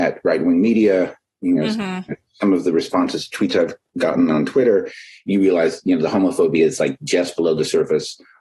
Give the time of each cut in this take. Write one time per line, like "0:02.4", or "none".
none